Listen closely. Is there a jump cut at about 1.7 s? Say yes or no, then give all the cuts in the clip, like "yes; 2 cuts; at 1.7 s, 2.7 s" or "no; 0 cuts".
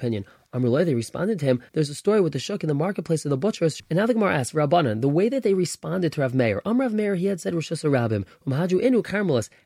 yes; 2 cuts; at 1.7 s, 3.8 s